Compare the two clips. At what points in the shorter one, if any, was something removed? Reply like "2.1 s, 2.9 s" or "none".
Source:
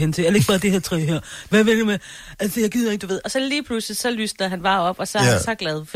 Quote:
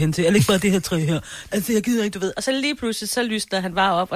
1.5 s